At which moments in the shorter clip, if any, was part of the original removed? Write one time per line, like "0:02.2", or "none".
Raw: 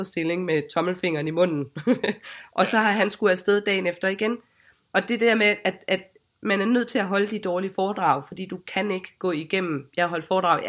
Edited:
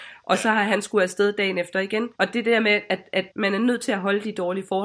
0:02.1
0:03.3